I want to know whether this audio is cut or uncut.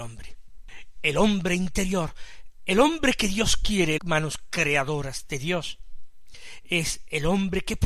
cut